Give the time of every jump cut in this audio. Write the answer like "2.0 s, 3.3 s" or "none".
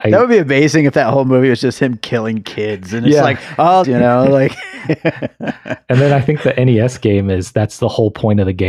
3.8 s